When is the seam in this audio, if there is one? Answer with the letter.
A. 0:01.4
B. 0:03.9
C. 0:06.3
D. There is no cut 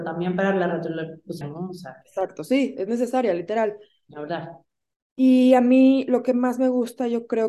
A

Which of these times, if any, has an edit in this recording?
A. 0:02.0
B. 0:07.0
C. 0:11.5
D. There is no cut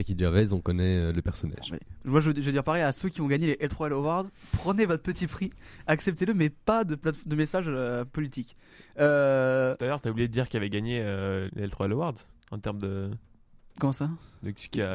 C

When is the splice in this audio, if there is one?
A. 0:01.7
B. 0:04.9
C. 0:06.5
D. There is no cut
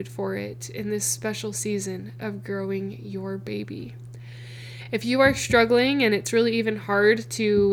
D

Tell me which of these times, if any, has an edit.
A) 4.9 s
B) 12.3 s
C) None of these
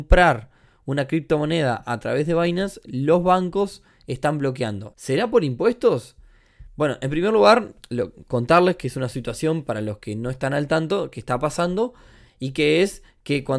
A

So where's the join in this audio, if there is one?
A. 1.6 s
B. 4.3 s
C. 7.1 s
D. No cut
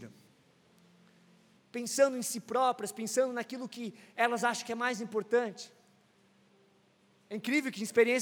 A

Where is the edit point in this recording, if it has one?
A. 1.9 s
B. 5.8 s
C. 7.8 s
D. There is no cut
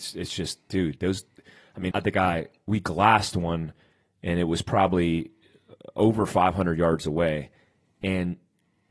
A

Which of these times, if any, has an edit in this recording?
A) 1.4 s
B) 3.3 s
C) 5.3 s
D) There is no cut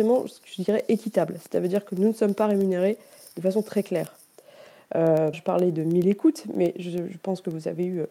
C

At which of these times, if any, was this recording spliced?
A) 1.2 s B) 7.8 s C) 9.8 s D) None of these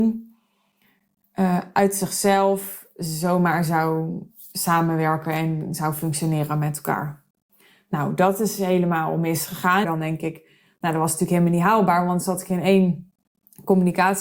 C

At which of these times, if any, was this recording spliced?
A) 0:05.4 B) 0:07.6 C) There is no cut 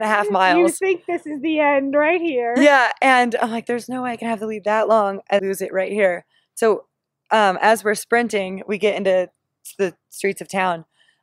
A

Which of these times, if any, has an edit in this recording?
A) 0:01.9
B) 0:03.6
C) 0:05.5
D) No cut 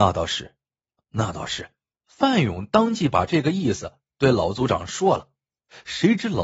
A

